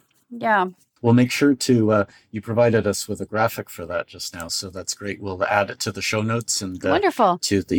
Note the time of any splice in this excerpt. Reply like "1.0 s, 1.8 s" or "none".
none